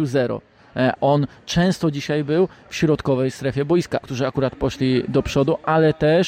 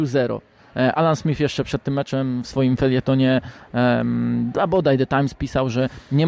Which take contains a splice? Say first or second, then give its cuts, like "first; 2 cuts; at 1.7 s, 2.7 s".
first; 2 cuts; at 1.0 s, 4.0 s